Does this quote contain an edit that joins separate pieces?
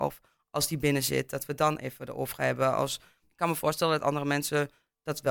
yes; 1 cut; at 3.2 s

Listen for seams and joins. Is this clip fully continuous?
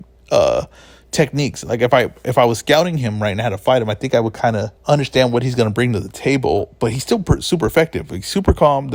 no; 1 cut; at 4.8 s

